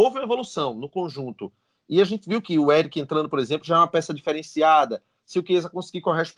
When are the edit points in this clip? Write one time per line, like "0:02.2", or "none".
none